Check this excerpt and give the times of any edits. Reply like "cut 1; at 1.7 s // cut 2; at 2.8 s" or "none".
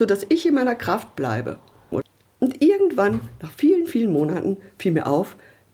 cut 1; at 1.9 s